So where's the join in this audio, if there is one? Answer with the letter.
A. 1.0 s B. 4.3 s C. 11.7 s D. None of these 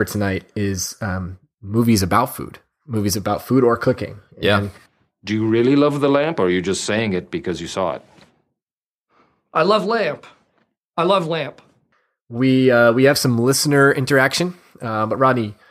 D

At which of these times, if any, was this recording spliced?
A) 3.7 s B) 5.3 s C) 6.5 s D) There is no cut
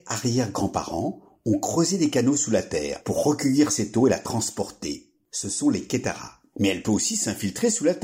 C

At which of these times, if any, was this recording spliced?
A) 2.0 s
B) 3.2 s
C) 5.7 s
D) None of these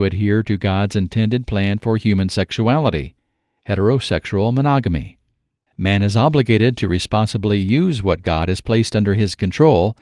C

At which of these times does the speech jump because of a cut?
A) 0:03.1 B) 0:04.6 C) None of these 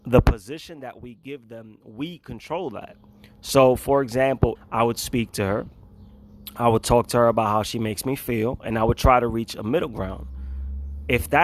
B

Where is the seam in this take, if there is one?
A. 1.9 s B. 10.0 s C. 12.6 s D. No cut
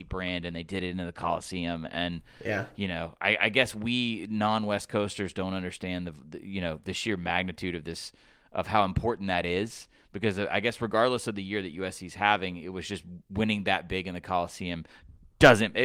D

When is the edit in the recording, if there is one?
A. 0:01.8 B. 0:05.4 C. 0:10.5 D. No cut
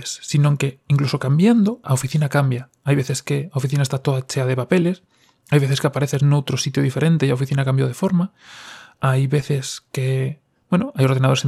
A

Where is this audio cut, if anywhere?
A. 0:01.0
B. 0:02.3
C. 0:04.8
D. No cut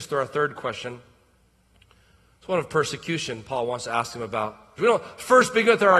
C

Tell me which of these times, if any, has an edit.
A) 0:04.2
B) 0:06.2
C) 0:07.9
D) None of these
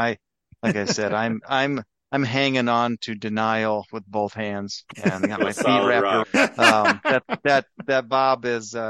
B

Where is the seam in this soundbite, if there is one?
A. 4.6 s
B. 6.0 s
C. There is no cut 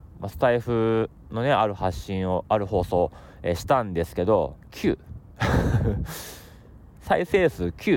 A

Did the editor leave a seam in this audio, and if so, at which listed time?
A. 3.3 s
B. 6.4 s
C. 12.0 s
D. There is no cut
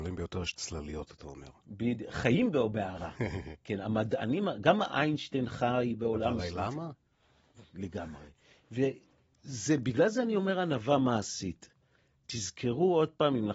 D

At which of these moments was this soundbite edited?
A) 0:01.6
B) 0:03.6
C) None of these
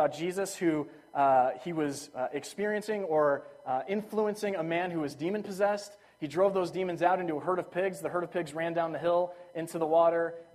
C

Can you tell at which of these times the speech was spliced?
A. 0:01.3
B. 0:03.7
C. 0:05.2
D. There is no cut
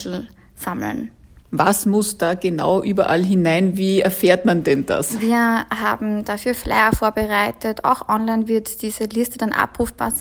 D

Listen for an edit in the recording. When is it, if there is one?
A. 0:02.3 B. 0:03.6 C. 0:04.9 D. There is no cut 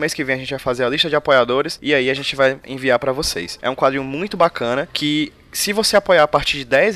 B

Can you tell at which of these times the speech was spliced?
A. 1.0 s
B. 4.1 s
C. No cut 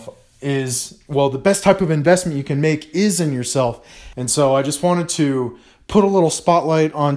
B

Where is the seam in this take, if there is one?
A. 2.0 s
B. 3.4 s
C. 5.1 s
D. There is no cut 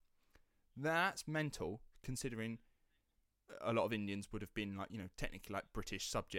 D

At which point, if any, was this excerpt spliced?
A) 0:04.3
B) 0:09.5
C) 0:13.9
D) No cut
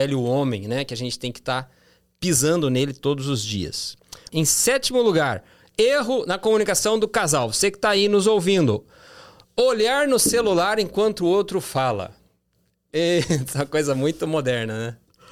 A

